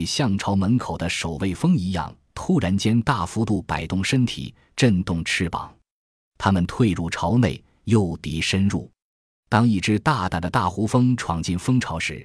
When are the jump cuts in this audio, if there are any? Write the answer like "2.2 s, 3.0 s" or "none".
6.3 s